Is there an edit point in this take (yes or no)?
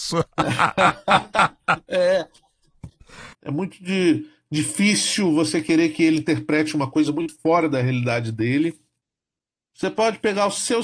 yes